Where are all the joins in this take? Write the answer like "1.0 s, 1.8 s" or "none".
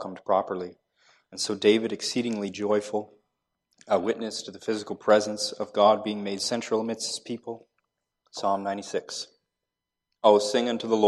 8.1 s